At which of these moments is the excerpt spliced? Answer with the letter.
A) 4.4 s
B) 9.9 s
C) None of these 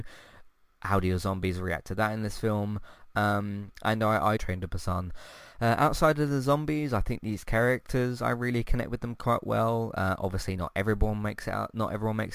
A